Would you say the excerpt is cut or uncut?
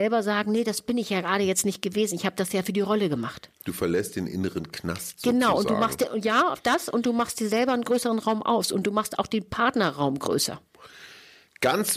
uncut